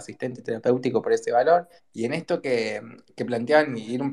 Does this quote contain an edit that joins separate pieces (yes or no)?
yes